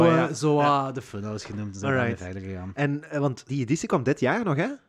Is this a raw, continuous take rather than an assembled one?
no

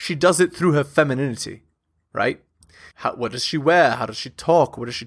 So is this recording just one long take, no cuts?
no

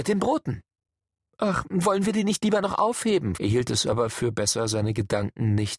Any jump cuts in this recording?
yes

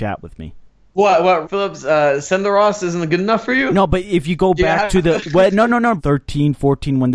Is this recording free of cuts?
no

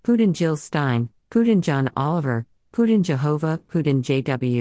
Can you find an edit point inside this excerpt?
yes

